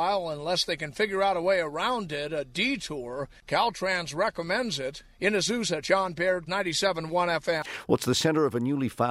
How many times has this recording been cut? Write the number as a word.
one